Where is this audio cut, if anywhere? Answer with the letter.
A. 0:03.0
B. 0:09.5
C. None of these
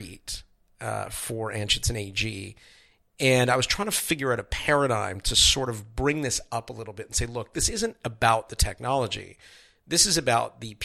C